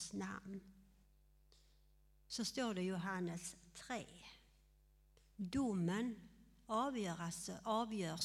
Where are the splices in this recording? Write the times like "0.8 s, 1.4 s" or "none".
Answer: none